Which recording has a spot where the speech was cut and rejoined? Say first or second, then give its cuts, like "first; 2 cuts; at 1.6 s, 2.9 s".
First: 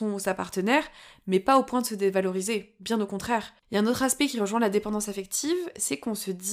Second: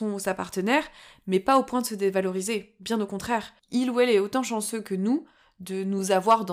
first; 1 cut; at 3.6 s